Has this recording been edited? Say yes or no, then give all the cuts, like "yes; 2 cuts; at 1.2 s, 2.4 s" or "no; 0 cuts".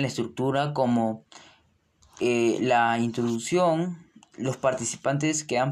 no; 0 cuts